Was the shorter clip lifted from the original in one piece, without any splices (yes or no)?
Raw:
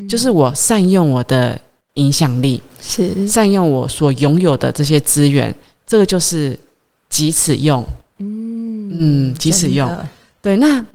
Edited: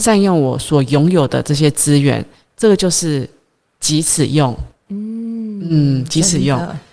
yes